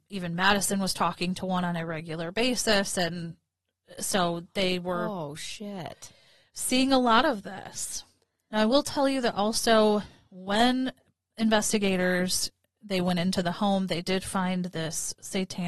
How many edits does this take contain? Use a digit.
0